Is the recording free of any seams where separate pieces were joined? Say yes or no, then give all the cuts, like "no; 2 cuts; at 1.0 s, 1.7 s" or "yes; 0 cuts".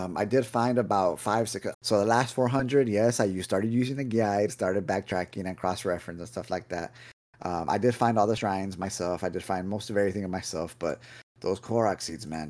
no; 1 cut; at 1.7 s